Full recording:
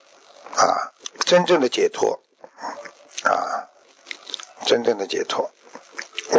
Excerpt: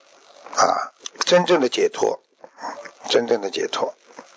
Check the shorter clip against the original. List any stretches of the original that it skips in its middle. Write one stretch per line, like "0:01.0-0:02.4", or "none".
0:03.0-0:04.5